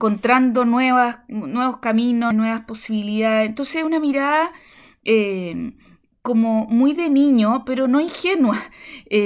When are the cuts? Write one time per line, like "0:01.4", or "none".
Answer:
0:02.3

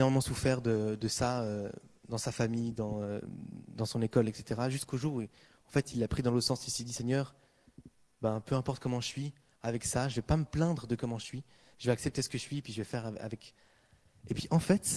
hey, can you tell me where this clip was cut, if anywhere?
none

